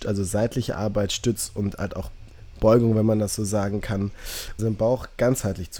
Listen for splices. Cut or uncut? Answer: cut